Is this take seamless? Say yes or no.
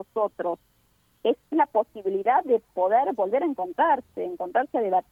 no